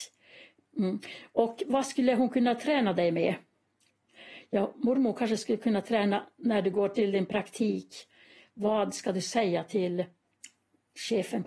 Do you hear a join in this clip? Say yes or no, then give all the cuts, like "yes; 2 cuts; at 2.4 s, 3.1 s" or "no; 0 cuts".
no; 0 cuts